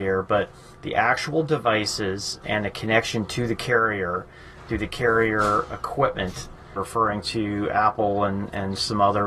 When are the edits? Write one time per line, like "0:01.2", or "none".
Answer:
0:06.8